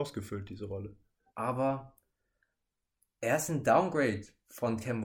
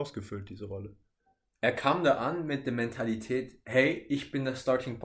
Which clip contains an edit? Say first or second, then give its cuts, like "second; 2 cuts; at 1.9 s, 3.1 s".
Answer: first; 1 cut; at 1.3 s